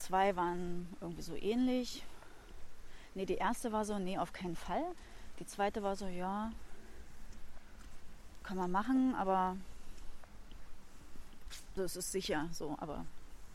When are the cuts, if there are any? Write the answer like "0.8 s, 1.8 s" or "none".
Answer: 11.8 s